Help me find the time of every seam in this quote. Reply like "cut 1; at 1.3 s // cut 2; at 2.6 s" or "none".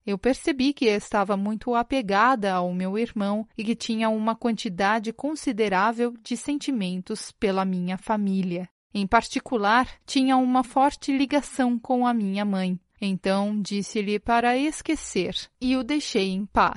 cut 1; at 10.0 s // cut 2; at 12.9 s